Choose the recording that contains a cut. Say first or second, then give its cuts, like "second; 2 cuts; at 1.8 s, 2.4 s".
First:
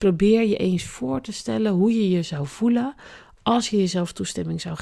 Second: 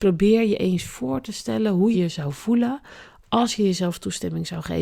second; 1 cut; at 1.9 s